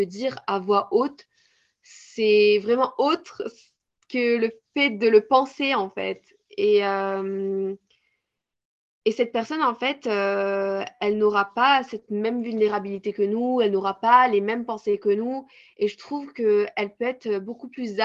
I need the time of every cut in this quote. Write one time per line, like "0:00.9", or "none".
none